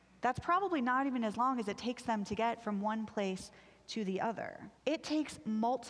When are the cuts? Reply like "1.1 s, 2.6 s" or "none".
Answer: 4.8 s